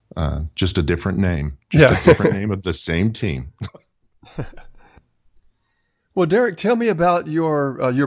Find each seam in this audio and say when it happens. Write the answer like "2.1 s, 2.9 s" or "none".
3.7 s

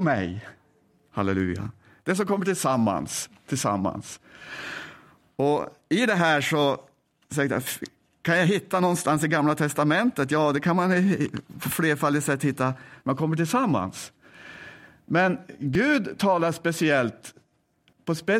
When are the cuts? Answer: none

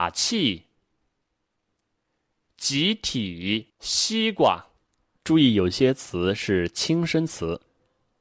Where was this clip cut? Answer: 3.7 s

